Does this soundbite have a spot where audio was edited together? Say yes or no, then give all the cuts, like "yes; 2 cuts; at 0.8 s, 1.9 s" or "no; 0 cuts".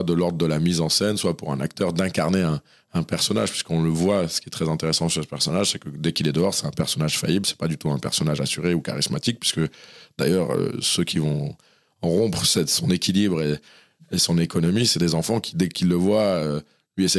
no; 0 cuts